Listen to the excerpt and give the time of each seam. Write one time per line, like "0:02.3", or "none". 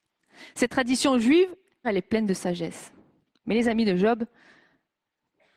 0:01.8
0:03.3